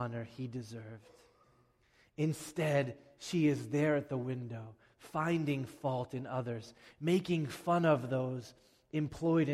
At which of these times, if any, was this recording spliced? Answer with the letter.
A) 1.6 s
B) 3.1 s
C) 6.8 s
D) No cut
D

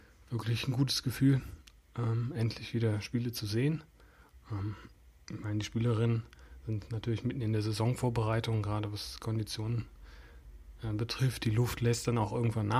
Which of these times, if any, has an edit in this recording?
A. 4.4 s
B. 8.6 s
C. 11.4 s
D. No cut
A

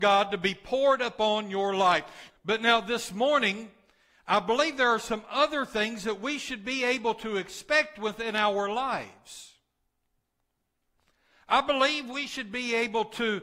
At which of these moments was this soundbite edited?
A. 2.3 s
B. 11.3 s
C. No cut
A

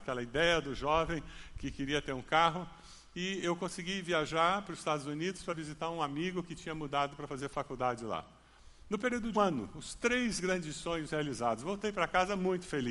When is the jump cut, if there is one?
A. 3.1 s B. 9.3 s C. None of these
B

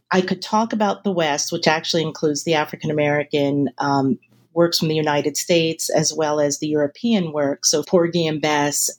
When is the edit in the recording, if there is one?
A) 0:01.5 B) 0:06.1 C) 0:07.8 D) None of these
C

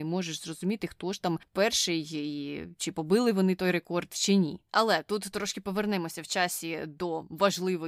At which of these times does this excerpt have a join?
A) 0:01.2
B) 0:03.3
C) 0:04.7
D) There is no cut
C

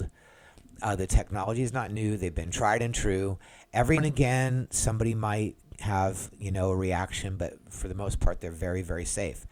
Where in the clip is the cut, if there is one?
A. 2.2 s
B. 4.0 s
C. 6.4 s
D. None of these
B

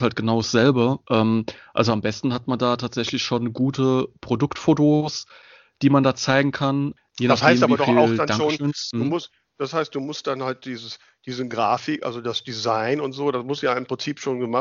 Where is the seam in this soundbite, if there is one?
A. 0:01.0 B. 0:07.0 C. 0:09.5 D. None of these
B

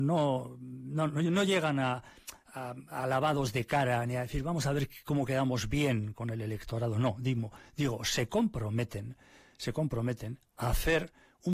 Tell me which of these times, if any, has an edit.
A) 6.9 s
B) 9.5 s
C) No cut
C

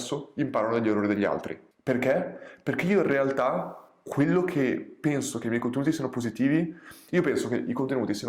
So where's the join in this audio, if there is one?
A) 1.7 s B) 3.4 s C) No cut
A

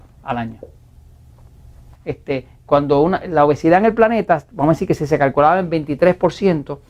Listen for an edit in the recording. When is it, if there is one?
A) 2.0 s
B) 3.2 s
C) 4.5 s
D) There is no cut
A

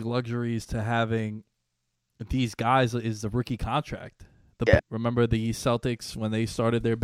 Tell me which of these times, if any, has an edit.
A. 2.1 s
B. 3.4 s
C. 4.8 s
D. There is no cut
C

